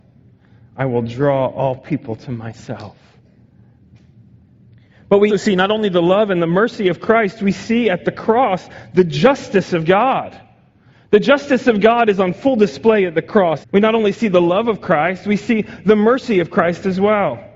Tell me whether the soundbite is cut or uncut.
cut